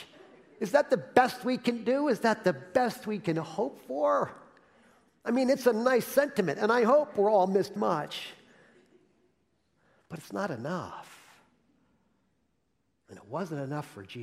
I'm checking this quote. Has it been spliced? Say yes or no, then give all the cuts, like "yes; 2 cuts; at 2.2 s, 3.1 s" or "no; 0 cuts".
yes; 1 cut; at 7.8 s